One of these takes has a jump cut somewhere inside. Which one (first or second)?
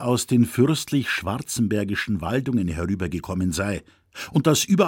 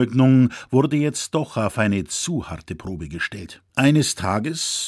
second